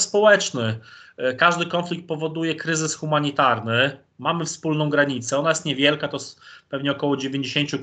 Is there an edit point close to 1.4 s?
no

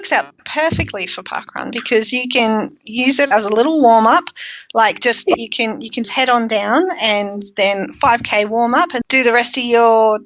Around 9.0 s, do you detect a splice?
yes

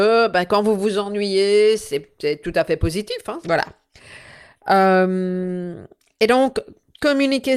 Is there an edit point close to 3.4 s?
yes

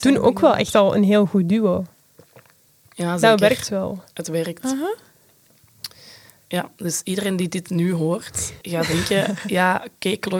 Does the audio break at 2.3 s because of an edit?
no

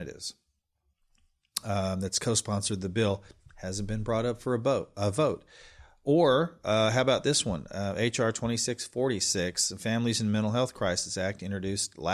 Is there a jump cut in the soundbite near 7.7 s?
no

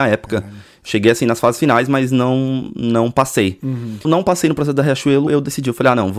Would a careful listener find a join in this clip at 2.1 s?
no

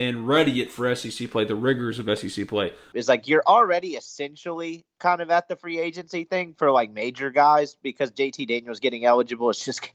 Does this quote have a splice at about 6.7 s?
no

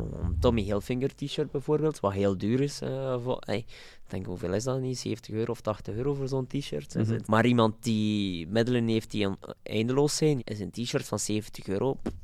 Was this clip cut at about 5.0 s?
no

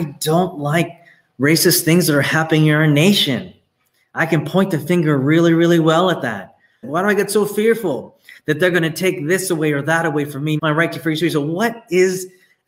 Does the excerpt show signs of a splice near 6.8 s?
yes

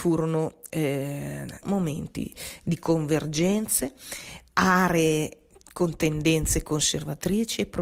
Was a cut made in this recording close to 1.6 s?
yes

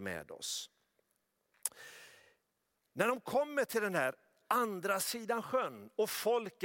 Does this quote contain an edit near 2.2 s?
no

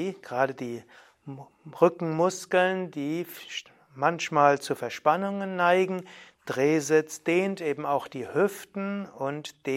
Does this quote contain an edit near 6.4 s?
yes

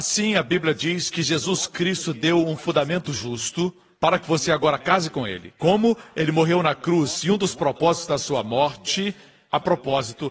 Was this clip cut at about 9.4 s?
no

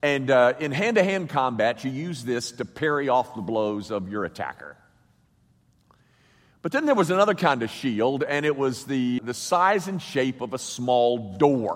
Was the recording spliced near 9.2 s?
yes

